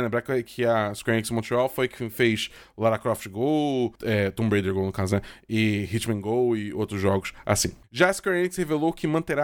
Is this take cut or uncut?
cut